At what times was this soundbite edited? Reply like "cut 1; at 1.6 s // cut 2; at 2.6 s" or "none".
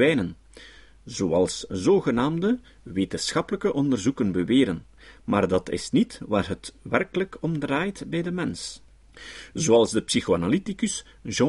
none